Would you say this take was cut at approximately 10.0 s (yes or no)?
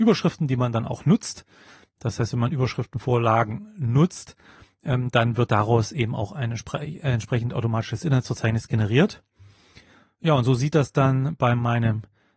no